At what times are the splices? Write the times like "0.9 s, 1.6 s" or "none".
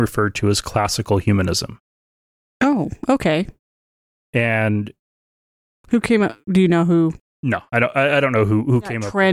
none